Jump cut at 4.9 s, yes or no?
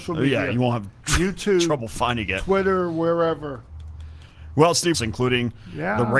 yes